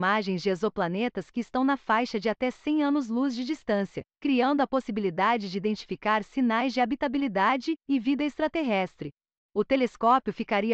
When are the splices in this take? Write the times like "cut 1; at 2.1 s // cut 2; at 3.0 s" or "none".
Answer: cut 1; at 4.1 s